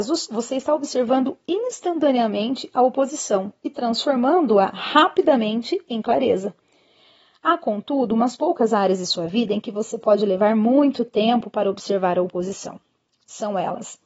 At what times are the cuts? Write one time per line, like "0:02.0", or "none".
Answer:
none